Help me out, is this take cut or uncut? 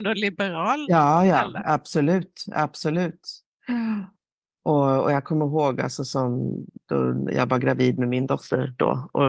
uncut